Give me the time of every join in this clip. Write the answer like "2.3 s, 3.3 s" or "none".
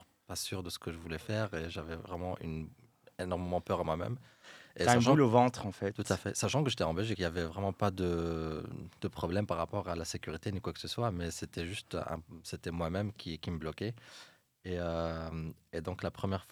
7.1 s

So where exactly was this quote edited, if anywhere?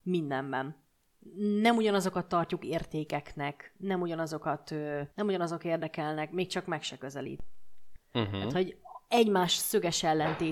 5.1 s, 8.0 s

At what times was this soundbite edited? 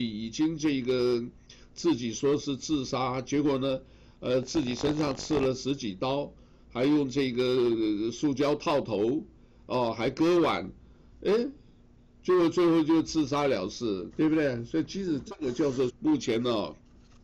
14.1 s, 15.9 s

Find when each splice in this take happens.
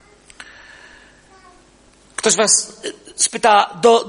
none

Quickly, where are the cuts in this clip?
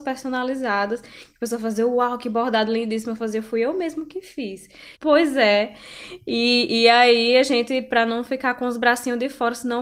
5.0 s

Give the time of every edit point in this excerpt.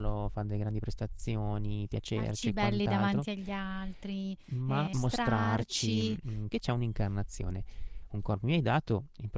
4.9 s, 6.5 s

